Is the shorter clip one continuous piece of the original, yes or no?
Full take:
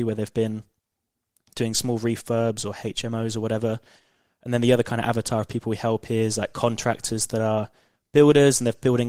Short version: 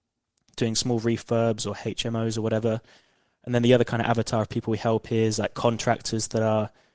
yes